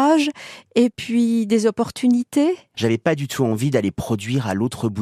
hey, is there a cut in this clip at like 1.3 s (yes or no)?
no